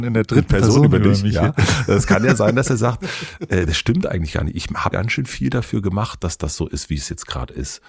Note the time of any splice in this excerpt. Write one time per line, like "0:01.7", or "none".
0:04.9

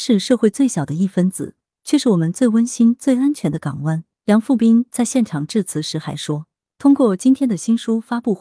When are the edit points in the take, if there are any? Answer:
0:04.2

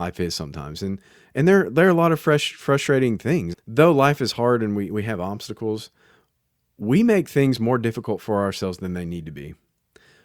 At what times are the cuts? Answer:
0:03.5

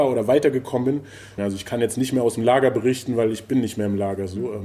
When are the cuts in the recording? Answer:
0:01.4

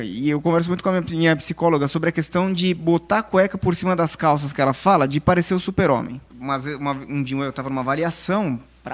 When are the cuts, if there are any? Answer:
0:06.3

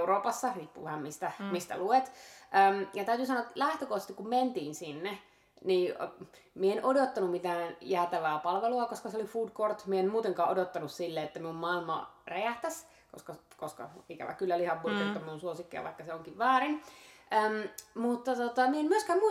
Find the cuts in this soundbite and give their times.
none

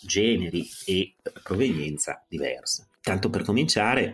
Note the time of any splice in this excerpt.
0:03.0

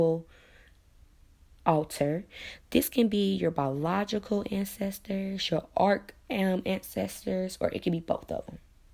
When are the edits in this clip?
none

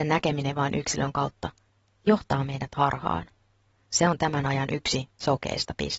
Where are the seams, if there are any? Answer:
none

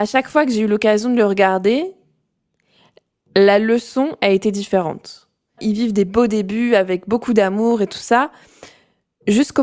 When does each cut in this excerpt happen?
0:05.6

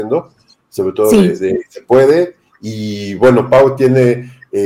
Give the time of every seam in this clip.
none

